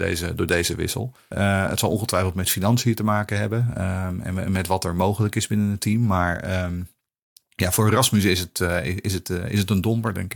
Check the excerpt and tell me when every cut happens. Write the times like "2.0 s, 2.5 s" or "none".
1.3 s